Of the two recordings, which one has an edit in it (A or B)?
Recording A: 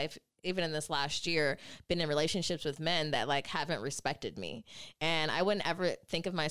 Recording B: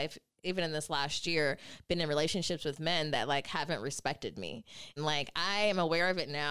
B